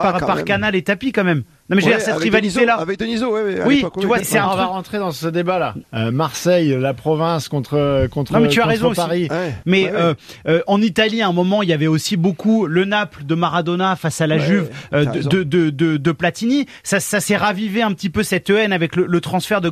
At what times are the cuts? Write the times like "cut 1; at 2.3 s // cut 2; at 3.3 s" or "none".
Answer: cut 1; at 4.2 s // cut 2; at 5.8 s // cut 3; at 9.6 s